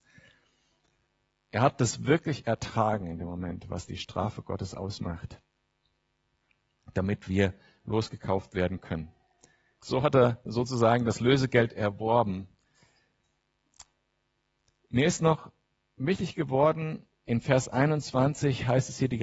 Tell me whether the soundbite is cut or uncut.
uncut